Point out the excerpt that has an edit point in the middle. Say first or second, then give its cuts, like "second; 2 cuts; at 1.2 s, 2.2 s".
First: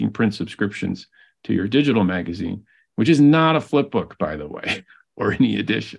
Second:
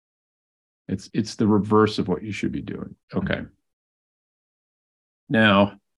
second; 2 cuts; at 1.1 s, 3.0 s